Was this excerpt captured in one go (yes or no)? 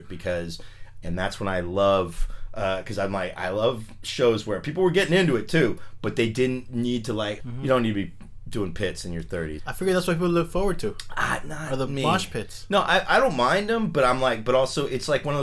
no